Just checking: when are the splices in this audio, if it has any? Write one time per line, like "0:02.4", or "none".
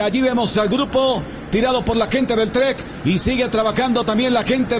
0:01.5